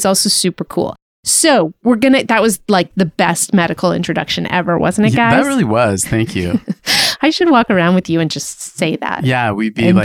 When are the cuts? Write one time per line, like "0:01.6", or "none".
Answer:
none